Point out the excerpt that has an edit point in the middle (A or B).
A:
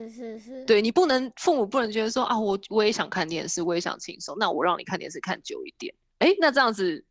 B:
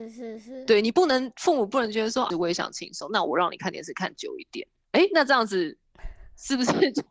B